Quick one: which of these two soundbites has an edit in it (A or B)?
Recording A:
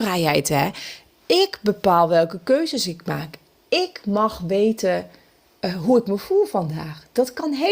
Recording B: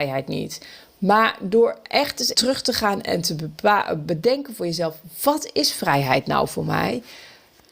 B